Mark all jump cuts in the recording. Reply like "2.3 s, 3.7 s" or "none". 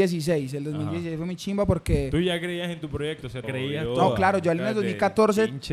3.4 s